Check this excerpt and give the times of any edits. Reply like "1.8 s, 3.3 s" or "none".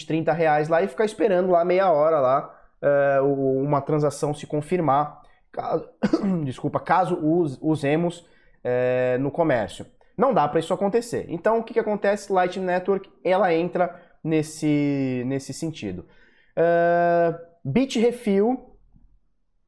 none

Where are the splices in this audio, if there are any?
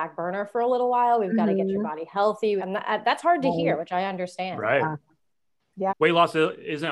2.6 s, 5.9 s

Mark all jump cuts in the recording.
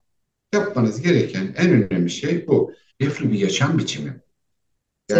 2.9 s

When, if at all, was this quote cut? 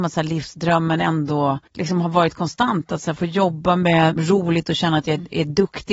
1.7 s, 4.2 s

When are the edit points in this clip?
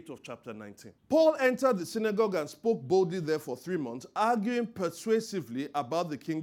1.0 s

